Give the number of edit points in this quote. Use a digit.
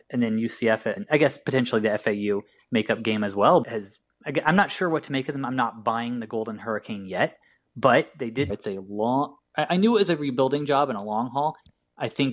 3